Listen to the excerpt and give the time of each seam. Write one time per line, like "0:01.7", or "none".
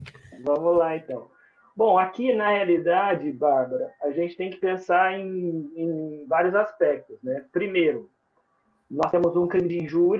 none